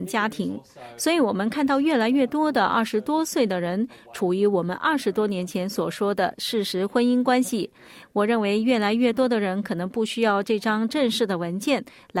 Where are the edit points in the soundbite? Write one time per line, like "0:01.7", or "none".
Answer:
0:08.0

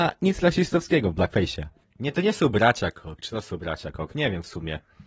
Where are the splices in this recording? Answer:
0:01.8

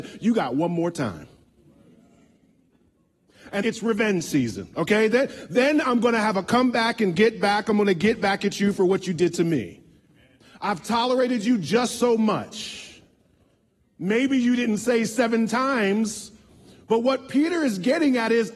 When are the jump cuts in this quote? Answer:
0:03.6

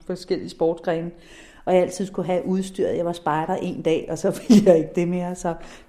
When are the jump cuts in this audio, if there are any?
none

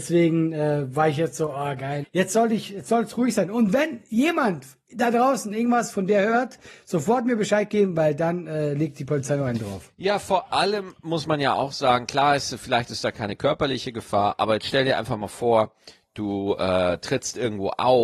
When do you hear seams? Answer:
0:02.0

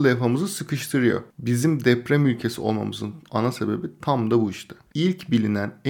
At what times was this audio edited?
0:04.9

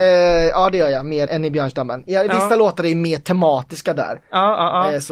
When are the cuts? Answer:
0:01.3

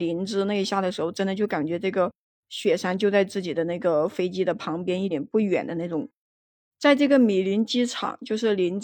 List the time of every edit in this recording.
0:05.1

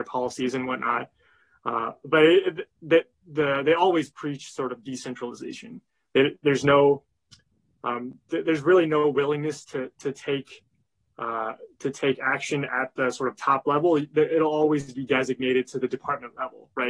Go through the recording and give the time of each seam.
none

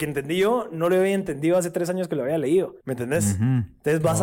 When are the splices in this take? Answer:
0:02.8

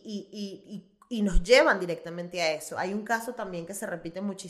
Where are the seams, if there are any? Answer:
none

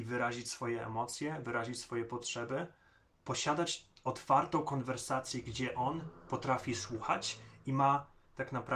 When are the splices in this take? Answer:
0:03.1

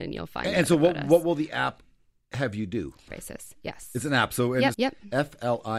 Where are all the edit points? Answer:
0:03.1
0:04.7

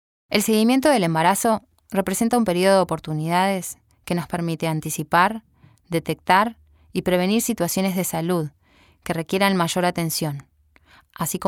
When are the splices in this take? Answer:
none

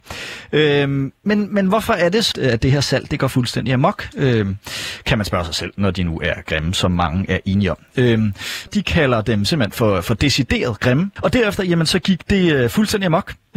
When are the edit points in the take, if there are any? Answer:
0:02.3
0:08.7
0:11.2

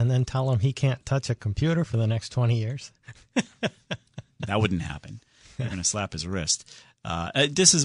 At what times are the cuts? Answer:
none

